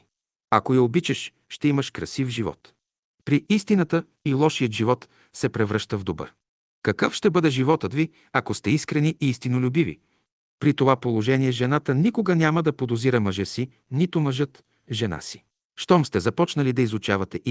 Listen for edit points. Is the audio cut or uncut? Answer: cut